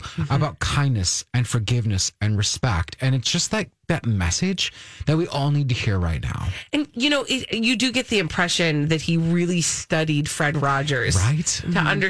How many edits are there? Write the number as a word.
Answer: zero